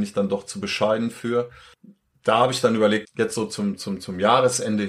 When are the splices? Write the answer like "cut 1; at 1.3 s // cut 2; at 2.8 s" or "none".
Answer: cut 1; at 3.0 s